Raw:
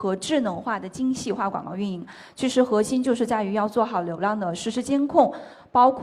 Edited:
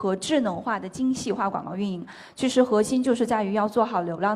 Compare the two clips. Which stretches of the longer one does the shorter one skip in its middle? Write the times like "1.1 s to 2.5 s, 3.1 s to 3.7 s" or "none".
none